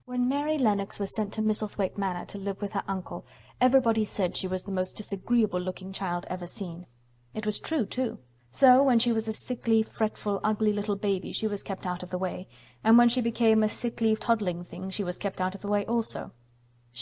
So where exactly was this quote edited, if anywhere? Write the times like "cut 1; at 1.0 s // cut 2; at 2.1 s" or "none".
cut 1; at 8.4 s // cut 2; at 14.2 s

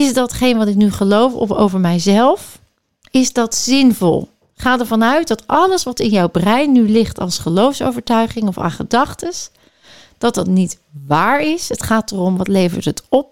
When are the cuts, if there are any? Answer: none

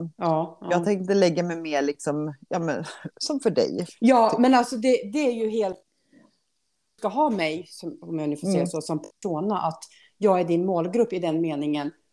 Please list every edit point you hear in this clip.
none

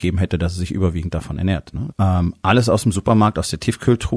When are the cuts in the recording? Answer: cut 1; at 1.9 s

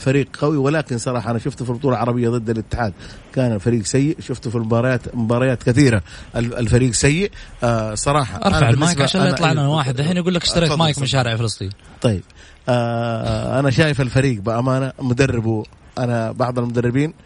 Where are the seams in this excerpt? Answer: none

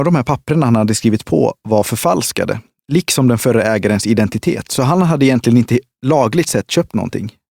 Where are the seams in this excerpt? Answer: none

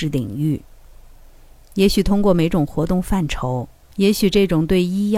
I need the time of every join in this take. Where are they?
cut 1; at 3.8 s

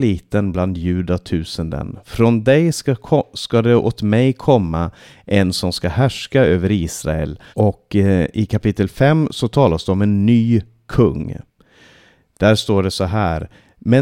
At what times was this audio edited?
cut 1; at 7.5 s

